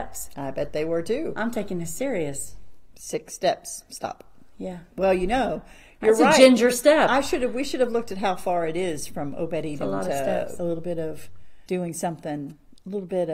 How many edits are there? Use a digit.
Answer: 2